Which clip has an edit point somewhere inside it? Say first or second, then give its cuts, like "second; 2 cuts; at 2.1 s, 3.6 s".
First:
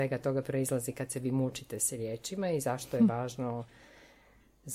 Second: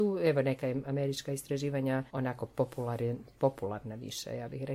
second; 1 cut; at 2.1 s